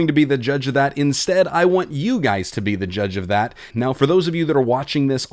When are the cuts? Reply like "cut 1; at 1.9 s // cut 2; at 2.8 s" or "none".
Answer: cut 1; at 3.7 s